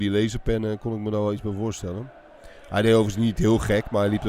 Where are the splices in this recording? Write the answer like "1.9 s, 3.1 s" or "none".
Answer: none